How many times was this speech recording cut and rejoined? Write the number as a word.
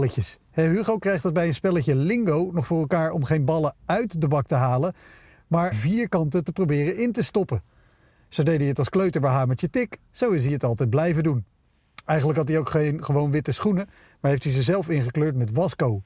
one